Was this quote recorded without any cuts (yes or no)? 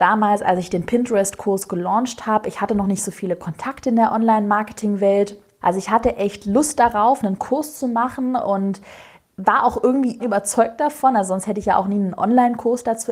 no